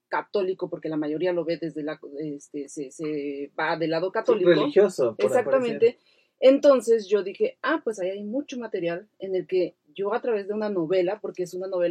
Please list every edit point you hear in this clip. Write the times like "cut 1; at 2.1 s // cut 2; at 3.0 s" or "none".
none